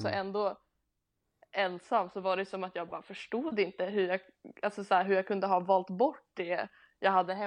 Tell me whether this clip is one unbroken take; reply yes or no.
yes